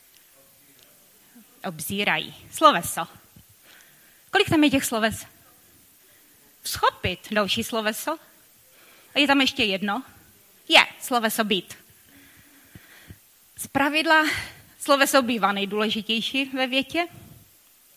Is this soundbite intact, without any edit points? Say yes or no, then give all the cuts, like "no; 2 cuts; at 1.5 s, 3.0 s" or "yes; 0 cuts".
yes; 0 cuts